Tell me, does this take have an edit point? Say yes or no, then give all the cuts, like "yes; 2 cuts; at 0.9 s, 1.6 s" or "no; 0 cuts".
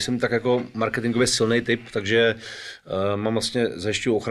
no; 0 cuts